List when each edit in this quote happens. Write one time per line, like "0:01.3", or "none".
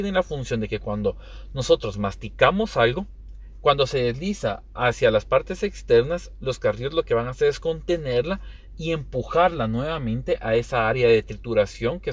0:03.6